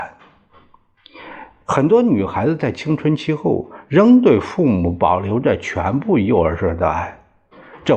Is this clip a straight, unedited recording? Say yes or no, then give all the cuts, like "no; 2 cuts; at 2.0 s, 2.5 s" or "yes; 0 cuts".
yes; 0 cuts